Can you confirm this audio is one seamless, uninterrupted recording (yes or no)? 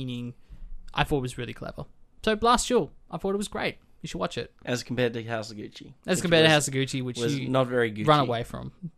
no